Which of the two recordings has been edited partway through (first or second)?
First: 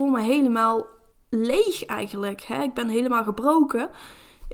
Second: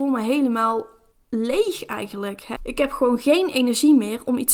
second